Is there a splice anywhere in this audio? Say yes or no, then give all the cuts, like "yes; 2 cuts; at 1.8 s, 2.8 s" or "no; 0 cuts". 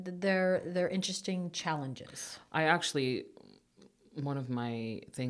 no; 0 cuts